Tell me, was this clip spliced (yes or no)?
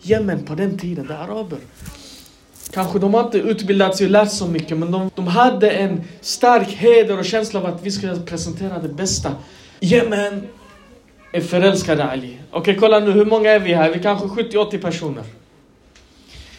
yes